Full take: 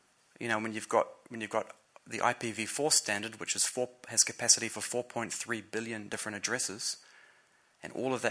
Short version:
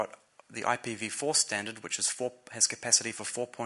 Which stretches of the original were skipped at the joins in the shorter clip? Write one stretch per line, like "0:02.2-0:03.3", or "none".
none